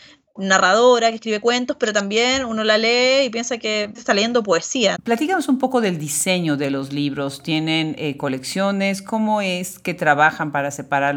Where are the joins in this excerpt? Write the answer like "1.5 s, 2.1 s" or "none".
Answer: 3.9 s, 4.9 s